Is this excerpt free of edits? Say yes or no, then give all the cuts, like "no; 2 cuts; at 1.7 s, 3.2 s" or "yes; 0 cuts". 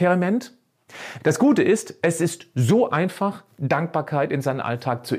no; 1 cut; at 1.2 s